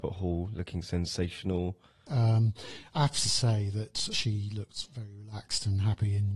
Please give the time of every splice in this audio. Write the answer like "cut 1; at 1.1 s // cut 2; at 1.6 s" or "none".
cut 1; at 2.1 s // cut 2; at 4.1 s